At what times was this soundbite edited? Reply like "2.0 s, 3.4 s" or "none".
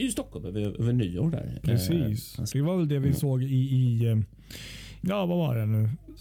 2.5 s, 5.0 s